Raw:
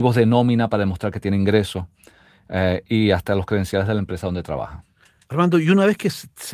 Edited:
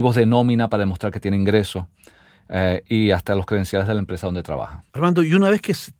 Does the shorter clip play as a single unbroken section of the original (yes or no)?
no